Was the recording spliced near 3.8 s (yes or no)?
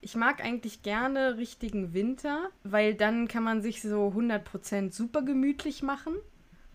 no